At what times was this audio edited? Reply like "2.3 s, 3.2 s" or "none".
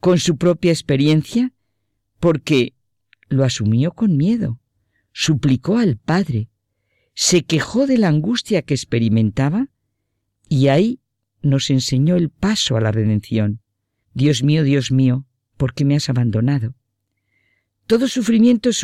14.0 s